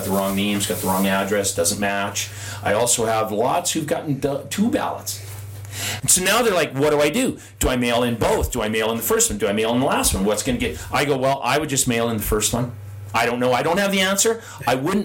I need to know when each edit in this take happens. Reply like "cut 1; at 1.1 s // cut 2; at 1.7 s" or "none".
cut 1; at 6.0 s